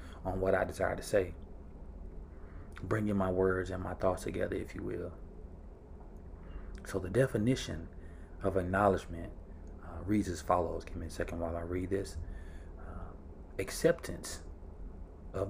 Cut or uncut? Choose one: uncut